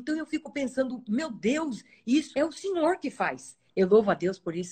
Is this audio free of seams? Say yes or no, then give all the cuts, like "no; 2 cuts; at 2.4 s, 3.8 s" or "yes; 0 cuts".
no; 2 cuts; at 2.3 s, 3.7 s